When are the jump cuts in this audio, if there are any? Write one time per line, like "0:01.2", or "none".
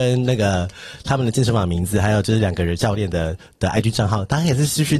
none